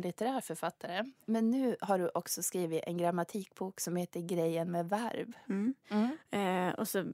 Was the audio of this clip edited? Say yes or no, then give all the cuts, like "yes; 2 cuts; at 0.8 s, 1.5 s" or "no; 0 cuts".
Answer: yes; 1 cut; at 5.8 s